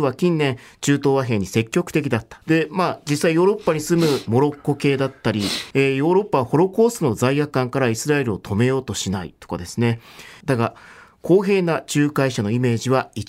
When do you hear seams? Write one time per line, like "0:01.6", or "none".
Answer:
0:02.4
0:05.7
0:10.4